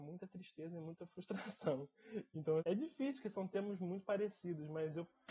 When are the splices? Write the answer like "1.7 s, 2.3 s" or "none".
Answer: 2.6 s